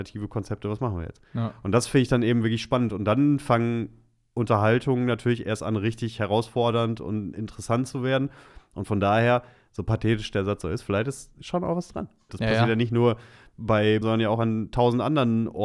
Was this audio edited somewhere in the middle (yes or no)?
yes